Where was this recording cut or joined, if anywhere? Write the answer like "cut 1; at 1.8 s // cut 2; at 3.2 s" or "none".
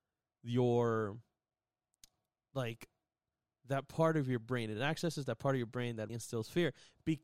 cut 1; at 6.1 s